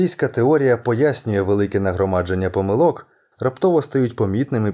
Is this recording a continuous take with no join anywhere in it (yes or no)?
no